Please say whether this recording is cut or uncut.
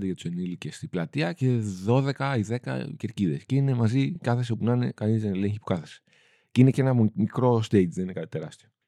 uncut